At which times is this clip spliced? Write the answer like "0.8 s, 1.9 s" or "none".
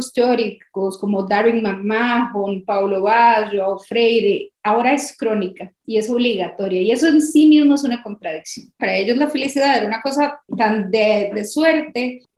8.8 s, 11.3 s